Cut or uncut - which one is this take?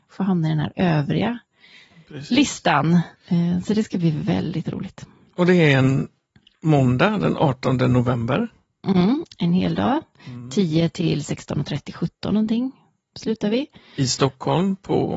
cut